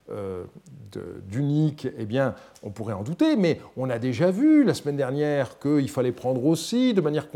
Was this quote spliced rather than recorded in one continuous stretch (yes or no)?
no